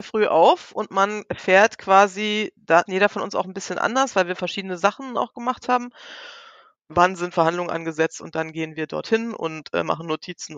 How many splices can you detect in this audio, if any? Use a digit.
2